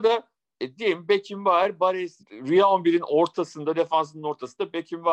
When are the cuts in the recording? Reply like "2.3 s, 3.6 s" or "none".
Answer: 2.2 s